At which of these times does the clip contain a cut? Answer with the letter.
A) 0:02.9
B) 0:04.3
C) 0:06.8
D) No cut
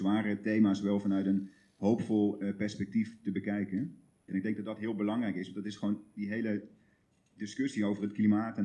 B